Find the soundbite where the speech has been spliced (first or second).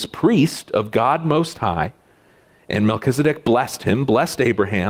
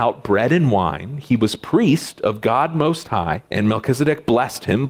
second